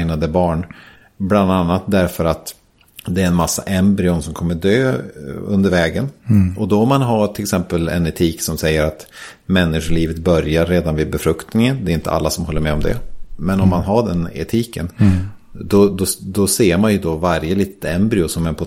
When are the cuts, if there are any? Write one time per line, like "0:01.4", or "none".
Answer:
none

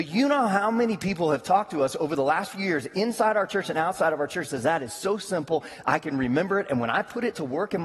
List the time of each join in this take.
none

